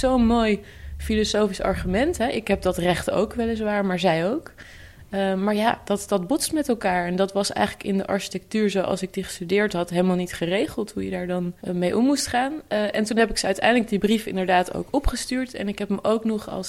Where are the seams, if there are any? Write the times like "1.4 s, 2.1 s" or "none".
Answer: 11.6 s